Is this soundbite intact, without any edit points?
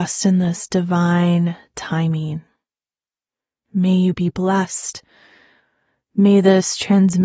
yes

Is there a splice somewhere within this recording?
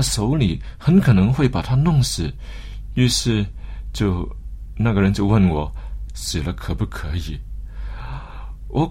yes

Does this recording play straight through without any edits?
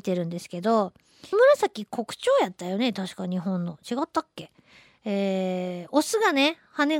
no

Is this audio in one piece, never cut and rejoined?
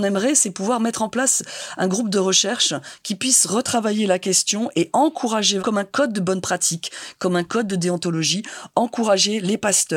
no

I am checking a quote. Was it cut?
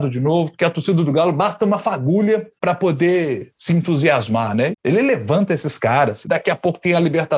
yes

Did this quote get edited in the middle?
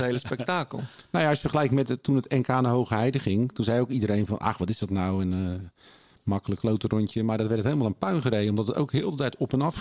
no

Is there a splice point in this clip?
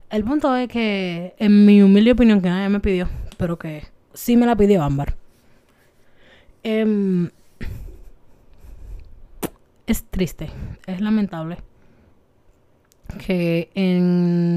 yes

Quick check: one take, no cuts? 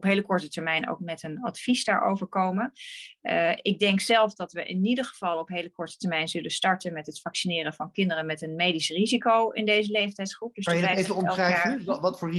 yes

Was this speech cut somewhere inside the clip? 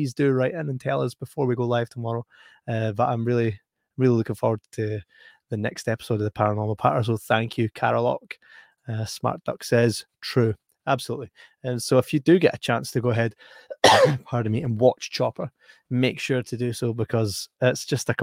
no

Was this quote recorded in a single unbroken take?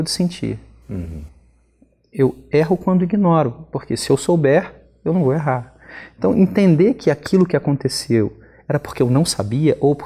yes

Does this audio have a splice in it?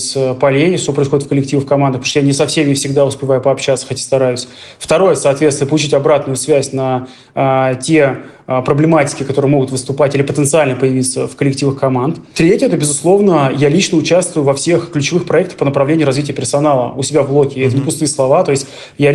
no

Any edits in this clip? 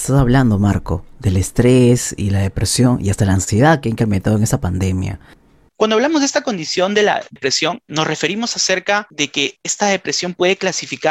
yes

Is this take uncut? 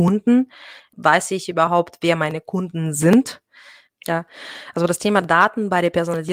no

